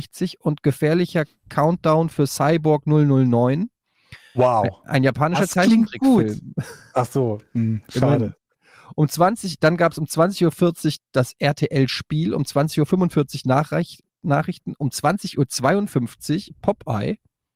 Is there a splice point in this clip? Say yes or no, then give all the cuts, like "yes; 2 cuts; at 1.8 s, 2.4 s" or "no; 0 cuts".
no; 0 cuts